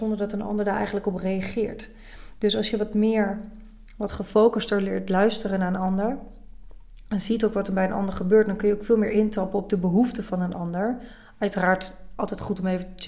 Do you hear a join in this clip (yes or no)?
no